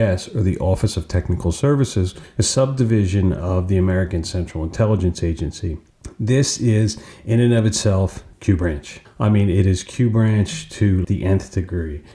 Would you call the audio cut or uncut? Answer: cut